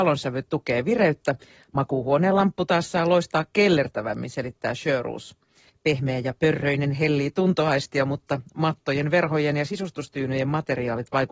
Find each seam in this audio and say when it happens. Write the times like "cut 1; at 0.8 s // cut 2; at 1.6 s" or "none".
cut 1; at 5.7 s